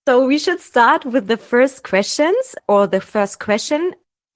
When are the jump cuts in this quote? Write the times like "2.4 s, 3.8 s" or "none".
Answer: none